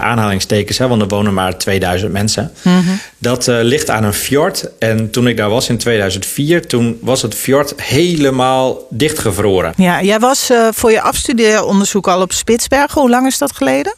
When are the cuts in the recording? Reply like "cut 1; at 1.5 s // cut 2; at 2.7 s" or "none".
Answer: cut 1; at 9.7 s